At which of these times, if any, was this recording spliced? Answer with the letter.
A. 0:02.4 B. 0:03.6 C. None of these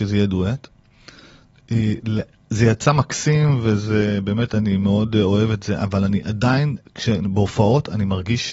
C